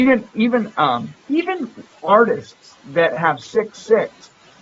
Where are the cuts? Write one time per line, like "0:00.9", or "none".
0:01.2
0:03.4